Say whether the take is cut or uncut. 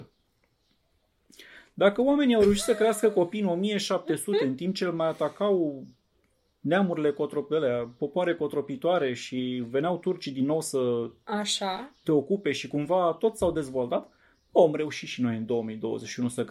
uncut